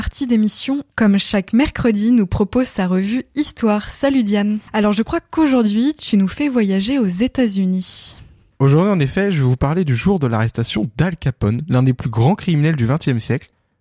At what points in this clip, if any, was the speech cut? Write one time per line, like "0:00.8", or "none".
0:00.9
0:04.7